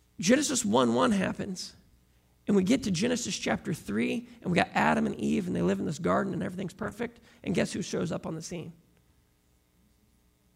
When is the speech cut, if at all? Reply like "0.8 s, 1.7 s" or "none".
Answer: none